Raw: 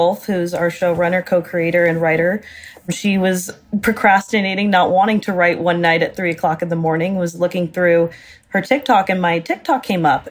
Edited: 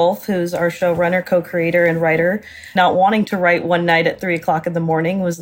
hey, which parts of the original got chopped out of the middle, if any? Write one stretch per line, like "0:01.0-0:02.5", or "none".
0:02.8-0:04.7